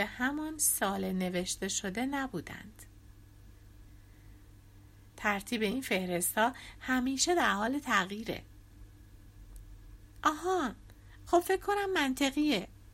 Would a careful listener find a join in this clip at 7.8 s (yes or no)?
no